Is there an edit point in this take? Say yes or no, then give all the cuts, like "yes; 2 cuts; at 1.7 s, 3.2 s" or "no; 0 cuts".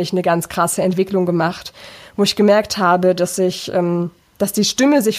no; 0 cuts